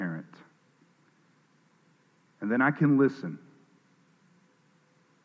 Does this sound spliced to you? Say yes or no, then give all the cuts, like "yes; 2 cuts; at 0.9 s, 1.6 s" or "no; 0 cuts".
no; 0 cuts